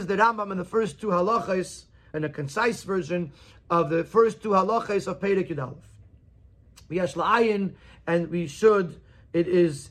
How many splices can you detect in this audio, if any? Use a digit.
1